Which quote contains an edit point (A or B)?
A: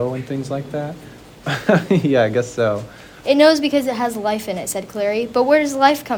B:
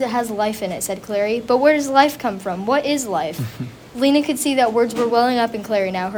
A